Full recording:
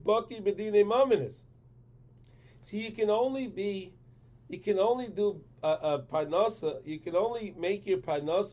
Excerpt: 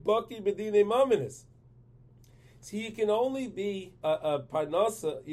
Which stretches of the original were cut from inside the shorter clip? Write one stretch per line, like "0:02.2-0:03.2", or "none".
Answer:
0:04.0-0:05.6